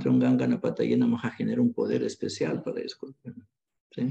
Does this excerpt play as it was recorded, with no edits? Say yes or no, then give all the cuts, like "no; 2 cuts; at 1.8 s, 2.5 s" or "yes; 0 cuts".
yes; 0 cuts